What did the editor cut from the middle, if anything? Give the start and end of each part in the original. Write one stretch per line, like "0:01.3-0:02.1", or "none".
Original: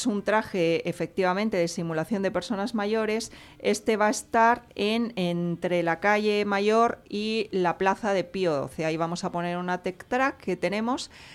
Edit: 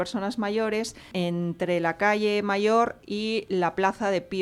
0:03.5-0:05.1